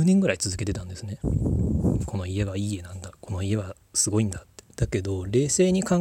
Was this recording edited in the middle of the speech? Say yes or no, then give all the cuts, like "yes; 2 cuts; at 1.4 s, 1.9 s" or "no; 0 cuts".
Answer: yes; 1 cut; at 4.7 s